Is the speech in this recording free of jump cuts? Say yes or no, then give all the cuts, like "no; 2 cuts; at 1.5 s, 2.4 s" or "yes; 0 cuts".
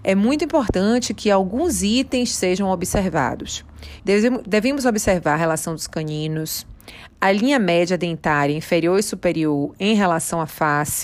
no; 2 cuts; at 4.0 s, 7.1 s